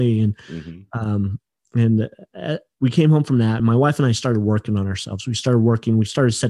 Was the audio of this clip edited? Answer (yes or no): no